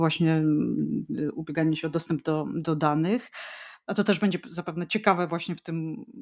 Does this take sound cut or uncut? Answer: uncut